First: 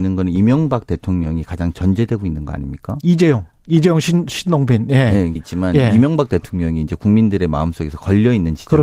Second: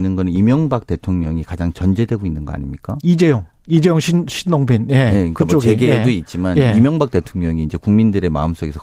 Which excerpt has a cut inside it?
first; 1 cut; at 5.4 s

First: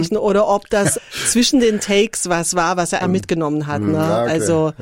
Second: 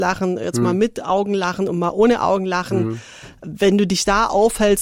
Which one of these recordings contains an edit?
first; 2 cuts; at 0.9 s, 3.0 s

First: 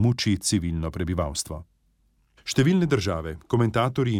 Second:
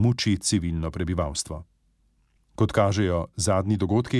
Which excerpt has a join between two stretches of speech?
first; 1 cut; at 2.4 s

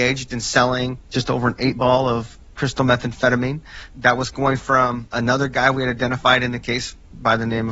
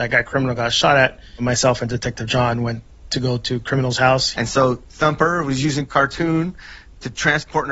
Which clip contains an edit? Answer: second; 1 cut; at 4.3 s

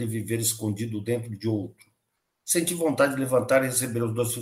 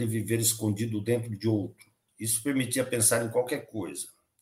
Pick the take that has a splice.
second; 1 cut; at 2.1 s

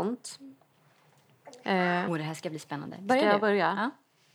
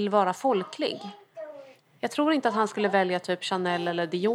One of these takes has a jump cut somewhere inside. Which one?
first; 1 cut; at 2.1 s

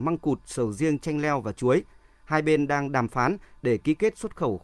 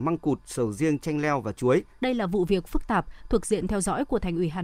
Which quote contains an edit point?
second; 1 cut; at 2.0 s

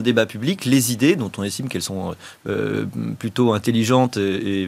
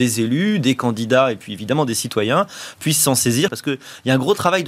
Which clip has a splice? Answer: second; 1 cut; at 3.5 s

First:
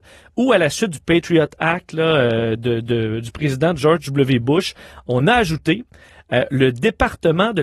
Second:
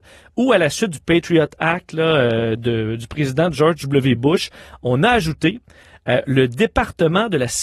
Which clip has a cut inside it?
second; 1 cut; at 2.6 s

